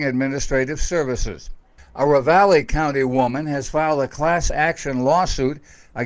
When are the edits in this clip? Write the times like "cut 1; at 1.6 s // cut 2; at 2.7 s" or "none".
cut 1; at 1.8 s